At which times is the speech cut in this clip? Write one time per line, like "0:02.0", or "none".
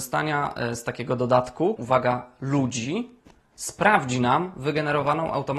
0:01.8